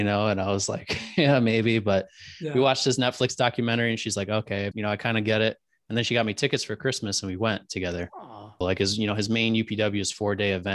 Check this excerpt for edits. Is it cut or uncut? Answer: cut